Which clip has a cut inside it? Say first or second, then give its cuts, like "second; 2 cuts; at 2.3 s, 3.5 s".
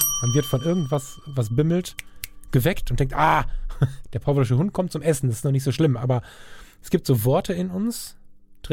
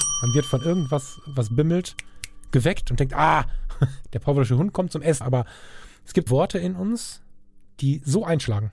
second; 3 cuts; at 5.2 s, 6.3 s, 7.6 s